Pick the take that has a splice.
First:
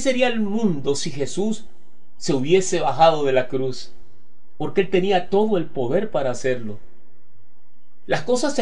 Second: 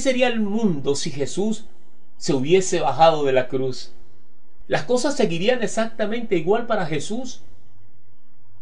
second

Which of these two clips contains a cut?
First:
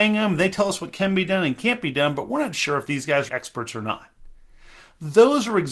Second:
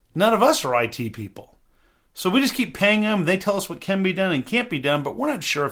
first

